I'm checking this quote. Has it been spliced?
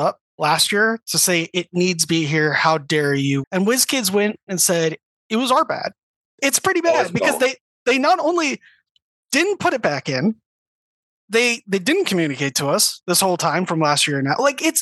yes; 2 cuts; at 3.4 s, 6.3 s

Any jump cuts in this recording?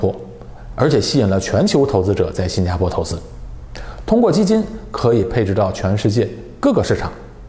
no; 0 cuts

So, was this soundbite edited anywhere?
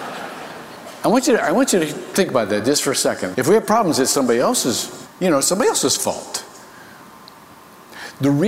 yes; 2 cuts; at 3.3 s, 5.1 s

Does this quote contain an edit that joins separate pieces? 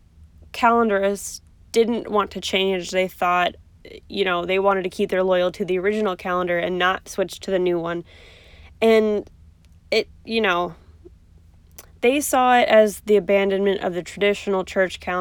no; 0 cuts

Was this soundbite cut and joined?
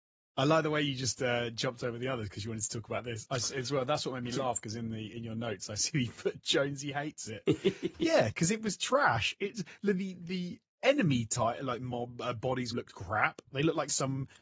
yes; 1 cut; at 12.7 s

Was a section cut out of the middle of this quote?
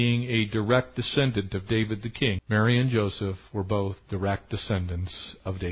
yes; 1 cut; at 2.4 s

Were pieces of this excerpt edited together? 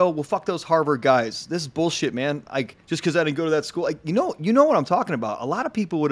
no; 0 cuts

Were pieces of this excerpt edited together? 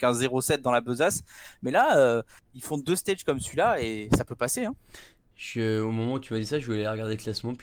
no; 0 cuts

